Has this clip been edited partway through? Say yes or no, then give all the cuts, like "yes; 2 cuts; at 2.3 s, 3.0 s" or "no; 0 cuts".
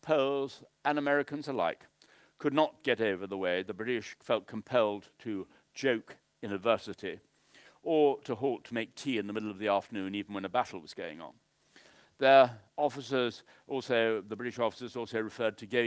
no; 0 cuts